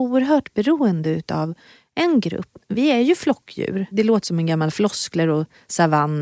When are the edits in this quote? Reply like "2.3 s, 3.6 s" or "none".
none